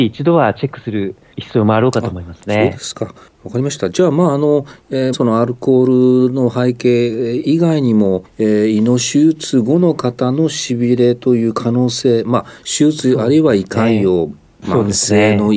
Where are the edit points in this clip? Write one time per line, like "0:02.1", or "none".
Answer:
0:05.1